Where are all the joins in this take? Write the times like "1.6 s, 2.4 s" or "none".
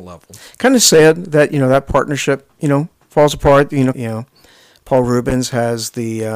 3.9 s